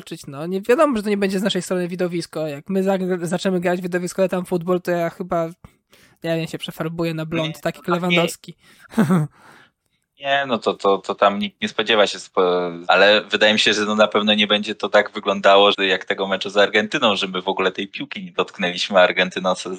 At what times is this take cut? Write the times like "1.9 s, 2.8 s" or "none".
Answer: 12.8 s, 15.7 s